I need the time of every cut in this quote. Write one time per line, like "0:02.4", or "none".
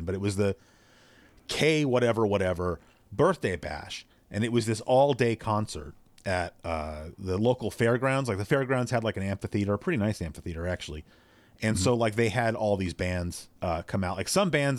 0:13.6

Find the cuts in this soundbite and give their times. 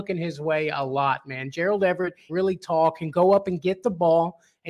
0:02.3

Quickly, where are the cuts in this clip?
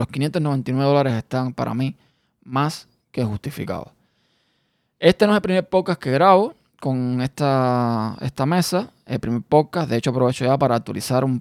none

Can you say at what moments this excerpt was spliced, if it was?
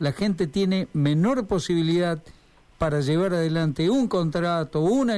none

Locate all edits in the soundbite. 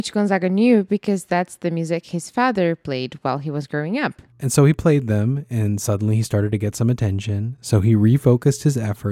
none

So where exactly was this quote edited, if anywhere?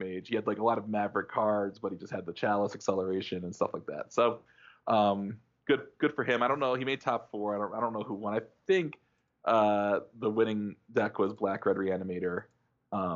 none

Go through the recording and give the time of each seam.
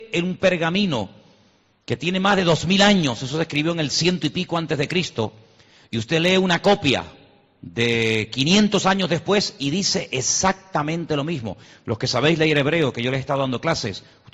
none

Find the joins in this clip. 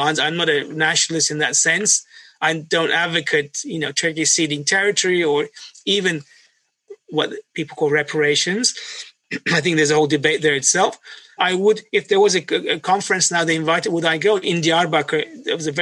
0:11.4
0:14.4

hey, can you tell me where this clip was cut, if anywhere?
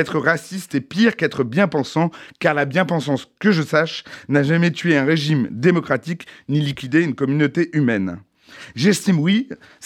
none

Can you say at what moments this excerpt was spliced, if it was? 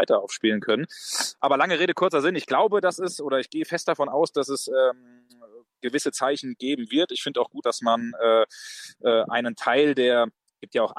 0:07.6

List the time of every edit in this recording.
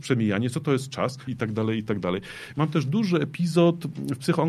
0:01.3
0:02.5

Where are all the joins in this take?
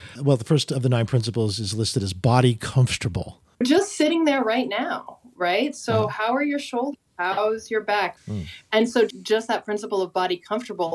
0:03.5
0:08.2

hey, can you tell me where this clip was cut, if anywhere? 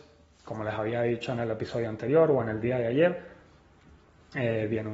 none

